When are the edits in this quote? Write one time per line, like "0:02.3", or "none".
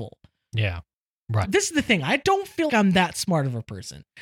0:01.4
0:02.7